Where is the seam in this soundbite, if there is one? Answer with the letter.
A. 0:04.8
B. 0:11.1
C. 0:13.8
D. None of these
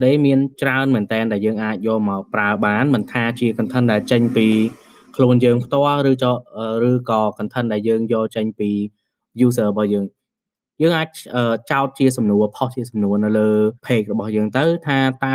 C